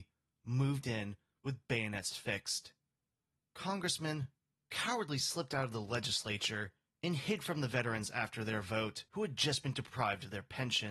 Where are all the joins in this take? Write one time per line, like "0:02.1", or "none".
0:03.4
0:09.1